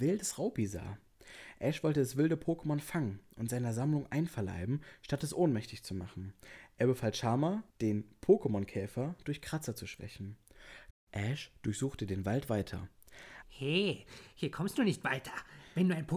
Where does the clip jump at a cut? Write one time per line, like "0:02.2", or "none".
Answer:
0:07.7
0:10.9
0:13.4